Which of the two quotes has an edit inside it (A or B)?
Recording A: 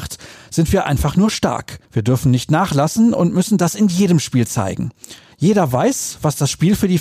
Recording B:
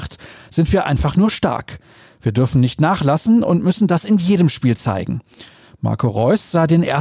A